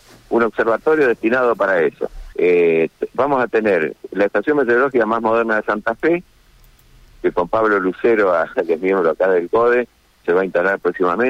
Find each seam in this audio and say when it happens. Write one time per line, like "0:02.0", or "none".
0:02.3
0:08.5
0:10.2